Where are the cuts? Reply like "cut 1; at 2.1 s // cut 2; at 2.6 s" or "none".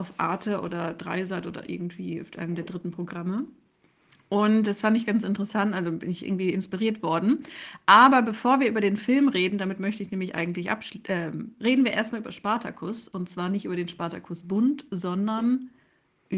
cut 1; at 11.5 s